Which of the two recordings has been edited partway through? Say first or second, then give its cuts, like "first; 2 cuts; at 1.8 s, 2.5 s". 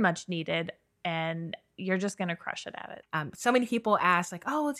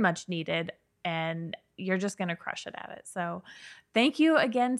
first; 1 cut; at 3.0 s